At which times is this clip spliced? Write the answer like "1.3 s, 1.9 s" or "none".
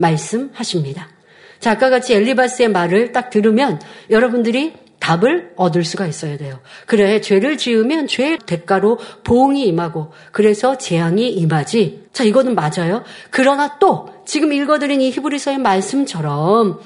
12.1 s

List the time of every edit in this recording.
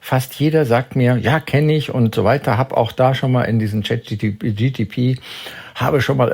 none

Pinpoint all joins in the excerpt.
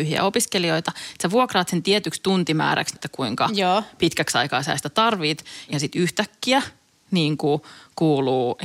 2.9 s, 5.7 s

